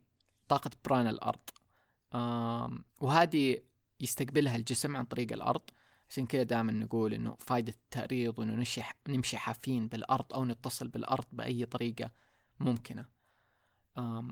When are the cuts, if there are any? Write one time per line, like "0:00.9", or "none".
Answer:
0:02.9